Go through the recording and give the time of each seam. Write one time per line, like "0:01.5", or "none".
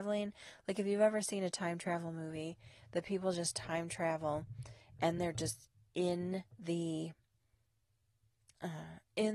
0:05.2
0:06.5